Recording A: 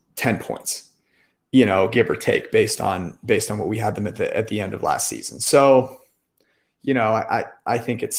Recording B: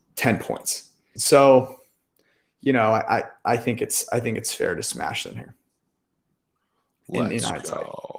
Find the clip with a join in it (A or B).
B